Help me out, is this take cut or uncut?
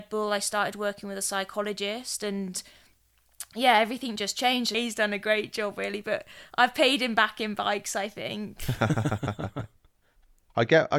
cut